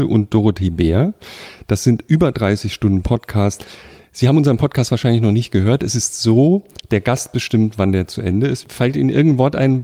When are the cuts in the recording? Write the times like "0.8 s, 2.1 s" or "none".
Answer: 8.6 s